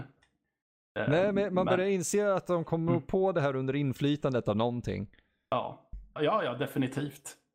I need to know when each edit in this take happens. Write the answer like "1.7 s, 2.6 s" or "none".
6.2 s